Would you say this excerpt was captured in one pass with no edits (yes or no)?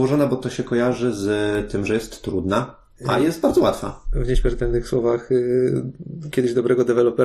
yes